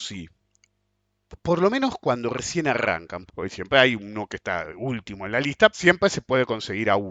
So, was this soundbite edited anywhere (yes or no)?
yes